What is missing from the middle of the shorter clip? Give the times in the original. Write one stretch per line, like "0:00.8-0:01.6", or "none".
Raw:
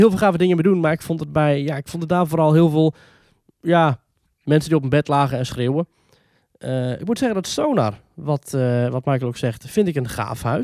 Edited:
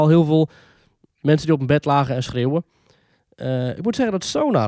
0:03.5-0:04.3